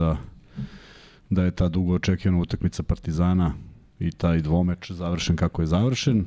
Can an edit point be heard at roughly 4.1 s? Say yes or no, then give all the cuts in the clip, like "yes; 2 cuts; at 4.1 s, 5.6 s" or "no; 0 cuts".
yes; 1 cut; at 4.1 s